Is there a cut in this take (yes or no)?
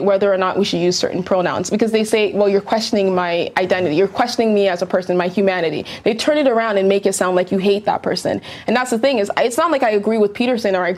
no